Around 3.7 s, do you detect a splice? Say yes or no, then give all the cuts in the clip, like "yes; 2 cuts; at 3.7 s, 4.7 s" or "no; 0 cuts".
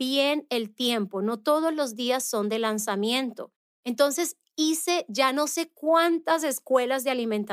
yes; 1 cut; at 3.7 s